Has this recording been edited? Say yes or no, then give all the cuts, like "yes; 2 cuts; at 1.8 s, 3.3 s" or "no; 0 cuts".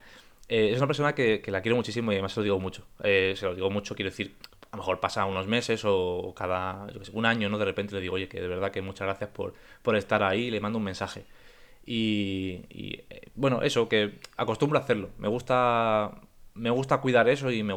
no; 0 cuts